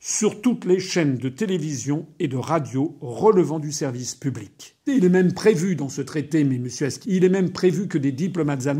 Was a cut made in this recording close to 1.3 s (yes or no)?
no